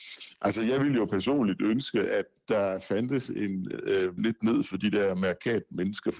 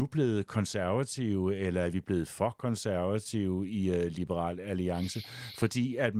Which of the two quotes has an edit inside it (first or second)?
first